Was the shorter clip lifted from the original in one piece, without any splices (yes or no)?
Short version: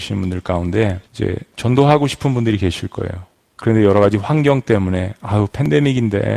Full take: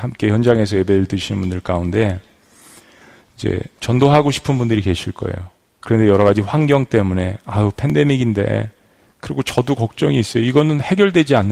no